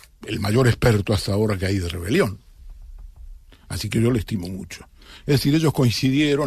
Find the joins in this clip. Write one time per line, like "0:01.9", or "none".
none